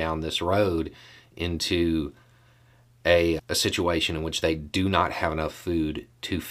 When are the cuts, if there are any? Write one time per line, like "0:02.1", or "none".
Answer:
0:03.4